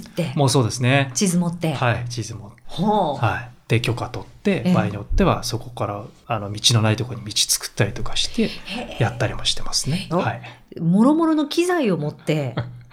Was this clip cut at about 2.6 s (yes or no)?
yes